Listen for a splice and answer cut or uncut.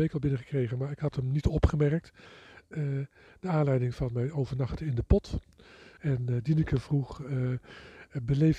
cut